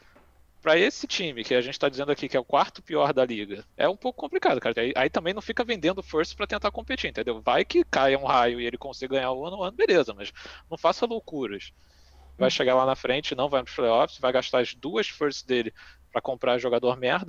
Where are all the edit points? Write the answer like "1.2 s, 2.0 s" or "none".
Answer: 3.7 s, 4.7 s, 12.4 s